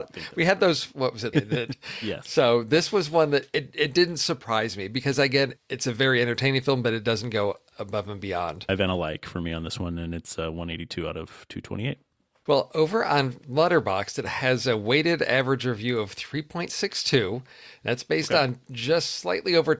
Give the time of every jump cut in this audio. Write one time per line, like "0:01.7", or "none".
0:01.3
0:05.6
0:08.7